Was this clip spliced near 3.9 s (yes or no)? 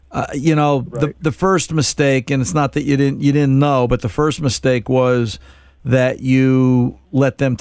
no